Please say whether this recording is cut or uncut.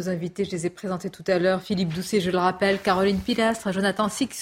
uncut